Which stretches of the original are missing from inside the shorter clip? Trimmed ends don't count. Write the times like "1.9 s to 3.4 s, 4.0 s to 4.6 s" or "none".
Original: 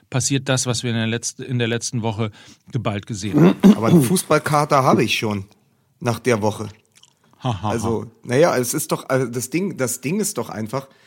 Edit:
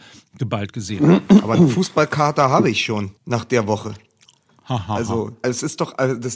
5.5 s to 5.9 s, 8.2 s to 8.5 s